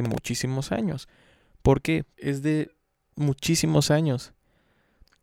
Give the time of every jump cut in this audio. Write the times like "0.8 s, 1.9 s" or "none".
2.2 s